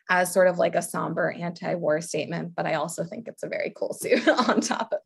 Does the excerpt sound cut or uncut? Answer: uncut